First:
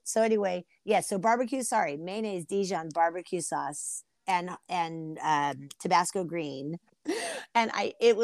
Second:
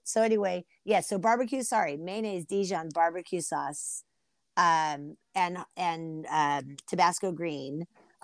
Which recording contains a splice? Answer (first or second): first